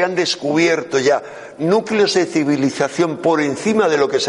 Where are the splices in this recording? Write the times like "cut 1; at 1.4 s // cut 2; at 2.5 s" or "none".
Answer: none

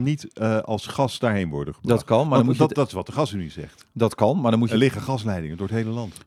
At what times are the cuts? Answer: none

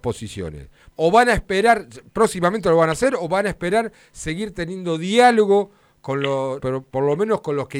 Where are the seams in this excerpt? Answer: cut 1; at 0.9 s // cut 2; at 6.6 s

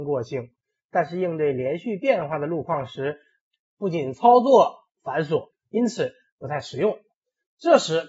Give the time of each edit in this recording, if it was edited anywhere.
cut 1; at 5.5 s

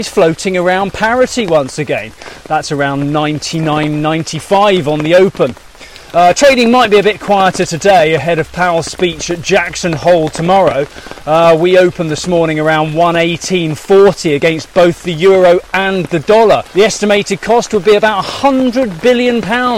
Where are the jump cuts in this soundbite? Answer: cut 1; at 6.1 s // cut 2; at 16.7 s

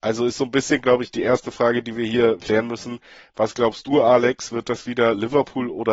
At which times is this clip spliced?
cut 1; at 2.4 s

